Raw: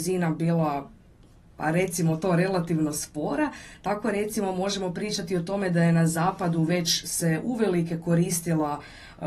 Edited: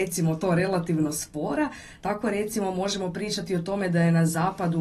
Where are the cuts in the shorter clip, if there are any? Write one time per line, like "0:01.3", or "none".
none